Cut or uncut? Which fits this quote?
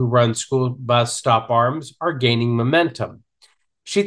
uncut